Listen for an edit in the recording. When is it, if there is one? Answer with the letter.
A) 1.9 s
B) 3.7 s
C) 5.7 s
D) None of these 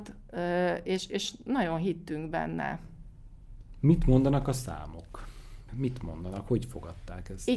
C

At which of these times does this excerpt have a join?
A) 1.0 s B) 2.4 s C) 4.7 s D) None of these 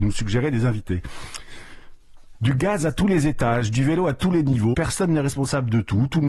C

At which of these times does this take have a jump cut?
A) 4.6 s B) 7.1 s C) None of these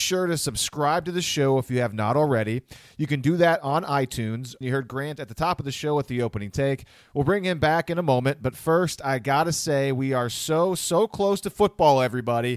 A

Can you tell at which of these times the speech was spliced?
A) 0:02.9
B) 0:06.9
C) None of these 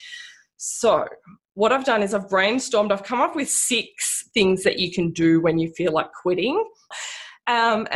B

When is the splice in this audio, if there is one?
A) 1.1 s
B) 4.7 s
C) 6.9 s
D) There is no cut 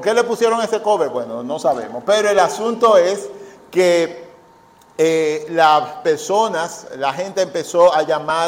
D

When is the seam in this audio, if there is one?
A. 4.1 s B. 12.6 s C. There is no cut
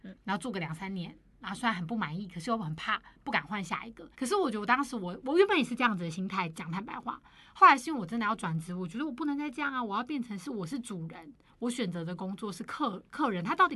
A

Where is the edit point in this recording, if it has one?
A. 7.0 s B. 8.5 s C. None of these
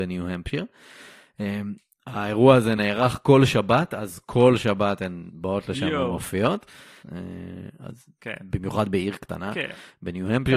A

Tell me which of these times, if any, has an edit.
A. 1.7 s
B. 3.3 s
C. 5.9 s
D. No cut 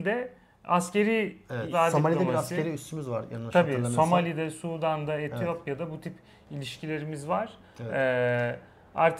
A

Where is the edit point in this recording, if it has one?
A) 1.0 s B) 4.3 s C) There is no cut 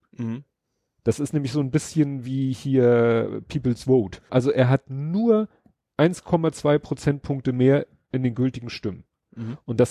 B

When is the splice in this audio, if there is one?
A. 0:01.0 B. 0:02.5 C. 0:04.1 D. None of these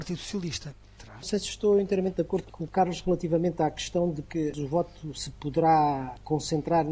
A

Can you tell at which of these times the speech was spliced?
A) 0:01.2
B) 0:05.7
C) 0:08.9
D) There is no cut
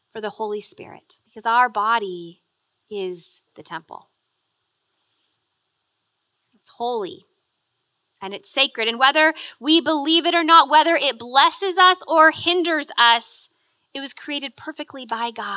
A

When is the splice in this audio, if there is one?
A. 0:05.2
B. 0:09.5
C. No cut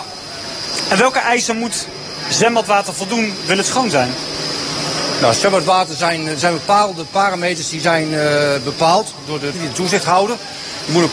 B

